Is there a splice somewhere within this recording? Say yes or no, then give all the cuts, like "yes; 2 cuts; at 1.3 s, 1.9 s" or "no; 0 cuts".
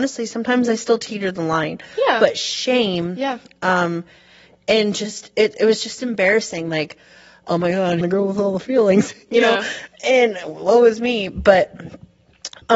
yes; 1 cut; at 8.0 s